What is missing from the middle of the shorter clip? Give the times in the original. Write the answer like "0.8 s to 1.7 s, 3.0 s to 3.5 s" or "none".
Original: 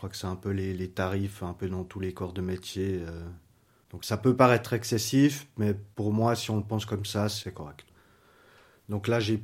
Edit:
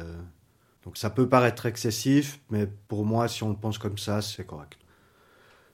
none

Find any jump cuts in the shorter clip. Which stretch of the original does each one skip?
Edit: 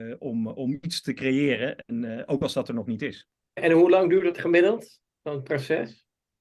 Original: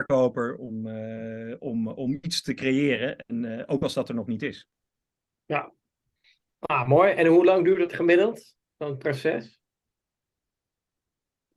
5.0 s to 7.1 s

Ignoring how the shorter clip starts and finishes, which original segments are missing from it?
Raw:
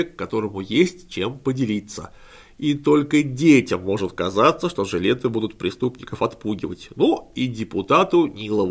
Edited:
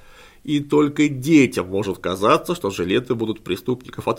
none

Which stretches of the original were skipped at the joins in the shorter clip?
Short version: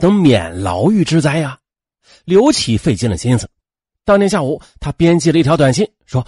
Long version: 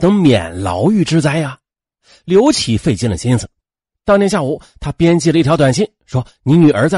none

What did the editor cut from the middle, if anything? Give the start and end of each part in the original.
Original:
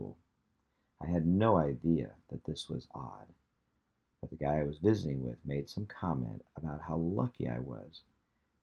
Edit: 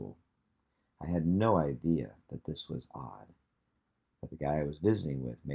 none

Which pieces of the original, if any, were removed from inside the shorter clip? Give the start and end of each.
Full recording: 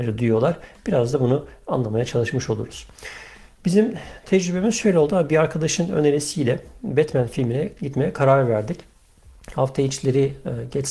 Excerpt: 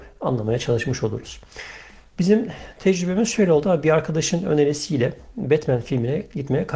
none

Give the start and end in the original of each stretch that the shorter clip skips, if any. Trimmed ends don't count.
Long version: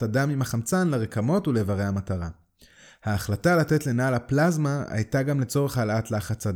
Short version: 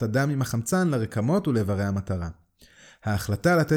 none

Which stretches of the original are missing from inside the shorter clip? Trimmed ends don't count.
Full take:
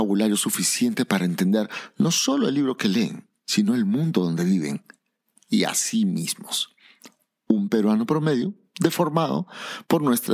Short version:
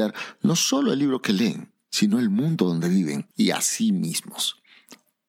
4.9 s to 5.4 s

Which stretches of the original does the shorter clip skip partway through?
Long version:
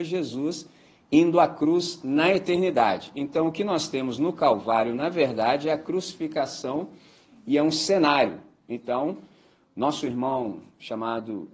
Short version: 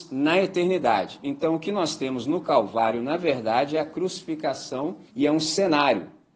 7.0 s to 7.4 s

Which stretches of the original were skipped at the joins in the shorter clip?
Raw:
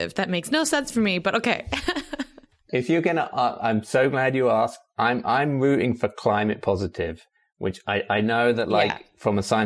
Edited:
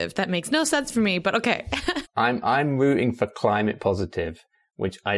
2.0 s to 4.9 s

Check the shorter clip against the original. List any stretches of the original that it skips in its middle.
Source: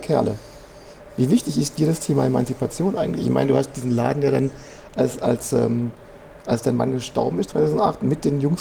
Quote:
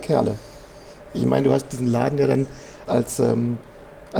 1.1 s to 3.2 s, 4.9 s to 5.2 s

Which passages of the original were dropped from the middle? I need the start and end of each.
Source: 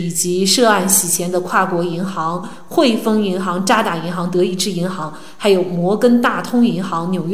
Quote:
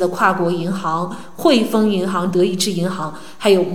3.6 s to 4.3 s

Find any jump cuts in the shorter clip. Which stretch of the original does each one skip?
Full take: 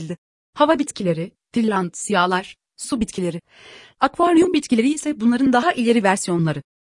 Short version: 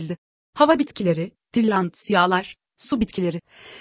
none

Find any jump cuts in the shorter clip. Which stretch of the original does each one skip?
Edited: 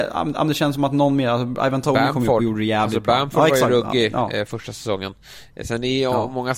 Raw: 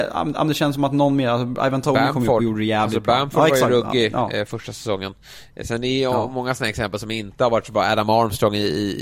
none

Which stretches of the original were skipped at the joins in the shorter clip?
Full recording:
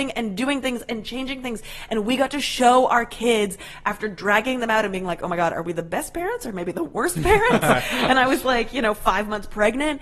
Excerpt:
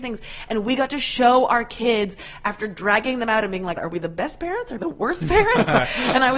5.2 s to 5.5 s, 6.5 s to 6.7 s

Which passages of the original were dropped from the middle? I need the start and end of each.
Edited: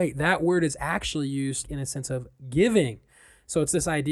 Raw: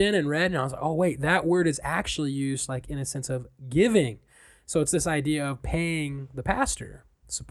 2.7 s to 2.8 s

